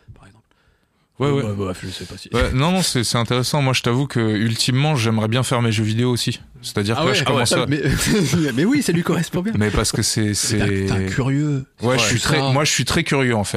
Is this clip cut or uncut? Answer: cut